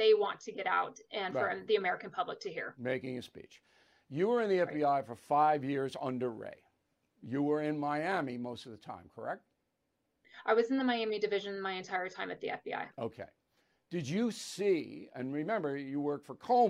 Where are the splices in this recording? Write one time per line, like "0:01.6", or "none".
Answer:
none